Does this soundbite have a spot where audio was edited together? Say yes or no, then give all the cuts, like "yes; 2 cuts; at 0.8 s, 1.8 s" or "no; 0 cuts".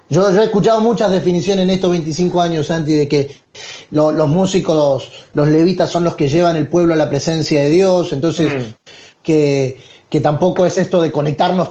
no; 0 cuts